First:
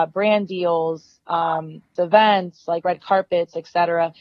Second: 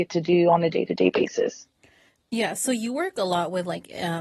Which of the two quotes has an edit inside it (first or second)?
first